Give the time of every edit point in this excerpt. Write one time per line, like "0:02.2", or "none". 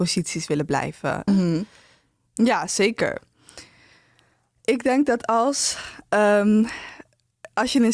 0:01.3